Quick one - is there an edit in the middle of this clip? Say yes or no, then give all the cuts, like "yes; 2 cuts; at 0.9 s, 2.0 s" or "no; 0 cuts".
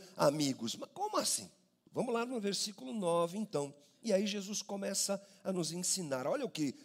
yes; 1 cut; at 1.9 s